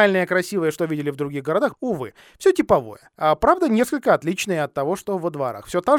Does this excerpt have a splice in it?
yes; 1 cut; at 1.7 s

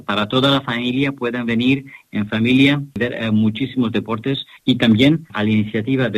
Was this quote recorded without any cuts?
no; 1 cut; at 4.6 s

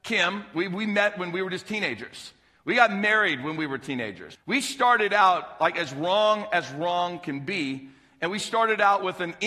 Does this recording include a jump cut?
yes; 1 cut; at 4.4 s

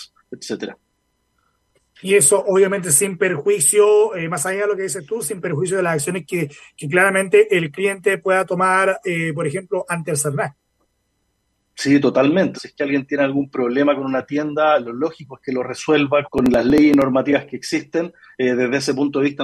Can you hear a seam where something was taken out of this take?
yes; 2 cuts; at 12.5 s, 16.2 s

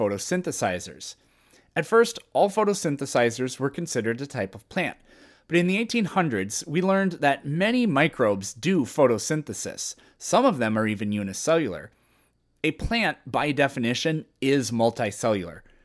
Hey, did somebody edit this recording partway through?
no; 0 cuts

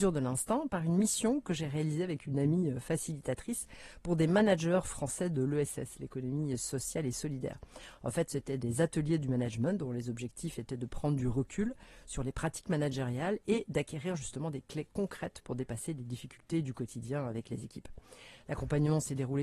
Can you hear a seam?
no; 0 cuts

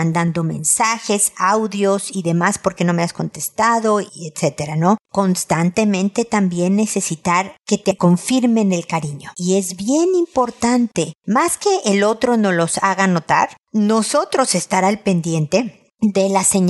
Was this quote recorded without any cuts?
no; 1 cut; at 9.3 s

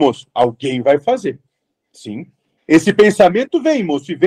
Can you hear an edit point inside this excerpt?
yes; 1 cut; at 2.6 s

